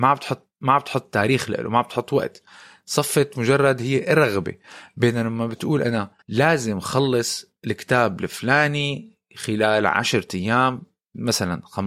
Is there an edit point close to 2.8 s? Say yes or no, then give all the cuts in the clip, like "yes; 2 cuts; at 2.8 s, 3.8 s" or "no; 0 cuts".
no; 1 cut; at 6.2 s